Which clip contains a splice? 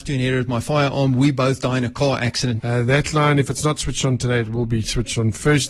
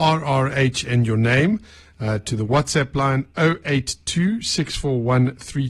first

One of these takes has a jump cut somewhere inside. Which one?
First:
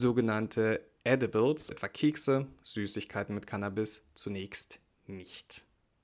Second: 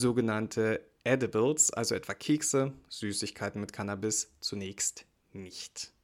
first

